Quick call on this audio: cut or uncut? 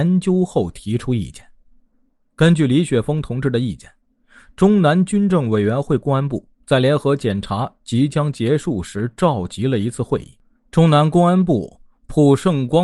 uncut